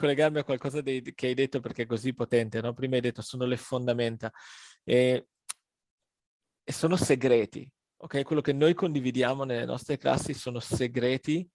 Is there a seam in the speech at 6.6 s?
no; 0 cuts

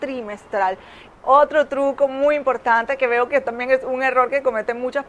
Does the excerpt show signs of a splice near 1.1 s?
yes; 1 cut; at 1.1 s

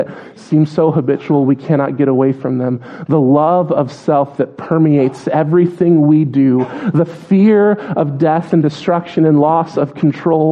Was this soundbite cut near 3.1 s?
no; 0 cuts

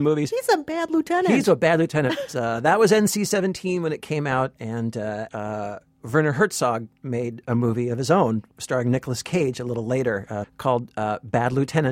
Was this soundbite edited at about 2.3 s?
no; 2 cuts; at 5.3 s, 10.4 s

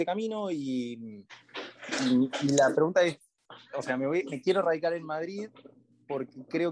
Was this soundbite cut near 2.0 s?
no; 0 cuts

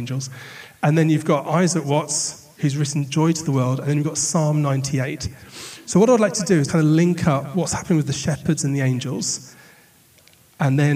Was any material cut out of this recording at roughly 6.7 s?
yes; 1 cut; at 6.7 s

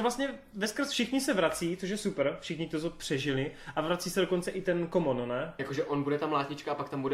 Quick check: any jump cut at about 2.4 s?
no; 1 cut; at 5.6 s

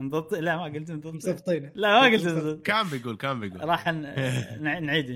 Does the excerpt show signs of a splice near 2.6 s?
yes; 1 cut; at 2.6 s

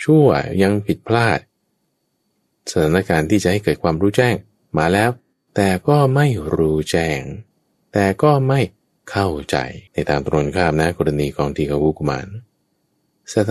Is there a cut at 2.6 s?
no; 1 cut; at 9.9 s

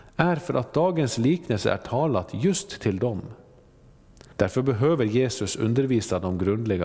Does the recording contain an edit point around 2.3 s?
no; 1 cut; at 4.3 s

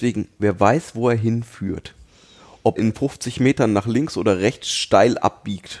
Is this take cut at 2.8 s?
yes; 1 cut; at 2.8 s

